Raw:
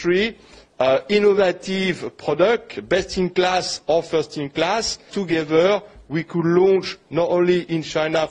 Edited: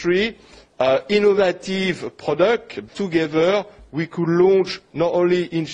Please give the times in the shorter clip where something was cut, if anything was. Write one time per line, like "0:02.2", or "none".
0:02.9